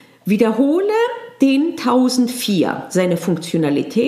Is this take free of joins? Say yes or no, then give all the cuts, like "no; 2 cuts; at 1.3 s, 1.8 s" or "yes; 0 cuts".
yes; 0 cuts